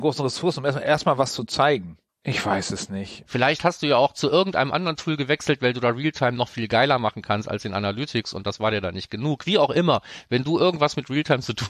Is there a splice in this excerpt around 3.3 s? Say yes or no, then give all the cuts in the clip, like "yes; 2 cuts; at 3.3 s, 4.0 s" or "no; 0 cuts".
yes; 2 cuts; at 2.1 s, 3.3 s